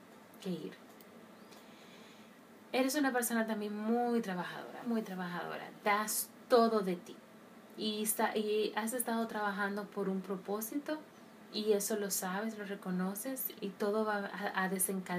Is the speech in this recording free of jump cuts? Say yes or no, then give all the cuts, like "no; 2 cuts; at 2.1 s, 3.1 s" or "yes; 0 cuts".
no; 2 cuts; at 4.8 s, 13.6 s